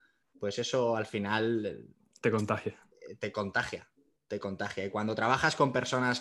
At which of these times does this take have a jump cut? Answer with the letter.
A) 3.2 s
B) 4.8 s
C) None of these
C